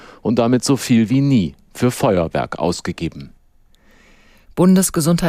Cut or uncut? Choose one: uncut